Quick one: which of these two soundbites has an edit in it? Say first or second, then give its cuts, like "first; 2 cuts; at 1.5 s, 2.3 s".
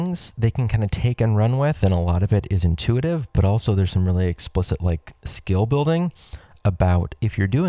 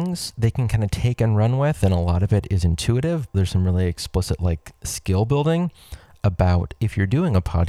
second; 1 cut; at 3.3 s